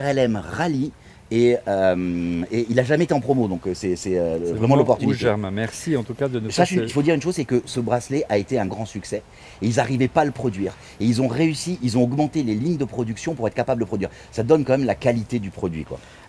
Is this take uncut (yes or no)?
no